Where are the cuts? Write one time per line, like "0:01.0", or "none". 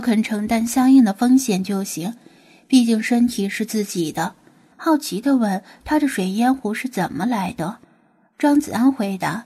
0:04.7
0:07.8